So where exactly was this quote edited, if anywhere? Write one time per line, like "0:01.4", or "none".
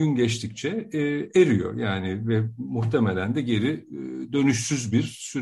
none